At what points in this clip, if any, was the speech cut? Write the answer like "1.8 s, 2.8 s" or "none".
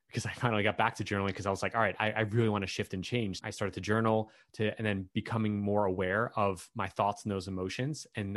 3.4 s